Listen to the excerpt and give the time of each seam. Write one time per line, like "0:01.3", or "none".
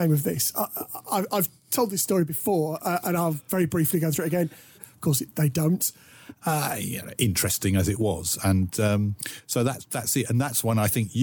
0:04.8
0:06.4